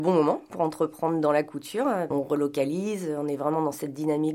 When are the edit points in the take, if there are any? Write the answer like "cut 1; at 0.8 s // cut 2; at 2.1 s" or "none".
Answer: cut 1; at 2.1 s